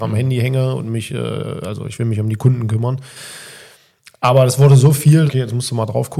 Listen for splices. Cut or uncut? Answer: cut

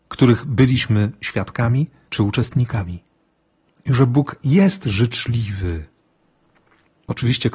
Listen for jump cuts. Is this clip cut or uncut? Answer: cut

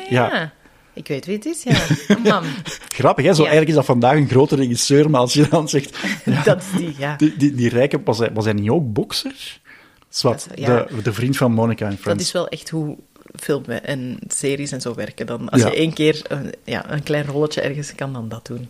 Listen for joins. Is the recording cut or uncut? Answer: uncut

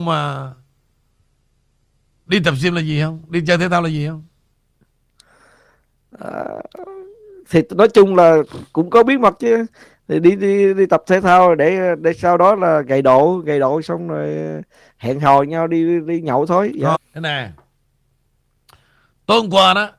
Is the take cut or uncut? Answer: cut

